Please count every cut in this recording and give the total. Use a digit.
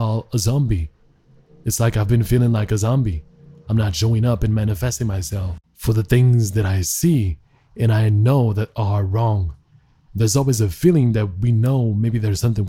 1